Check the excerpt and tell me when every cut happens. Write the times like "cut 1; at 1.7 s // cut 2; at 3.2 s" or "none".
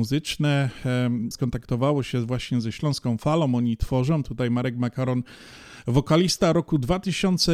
cut 1; at 1.3 s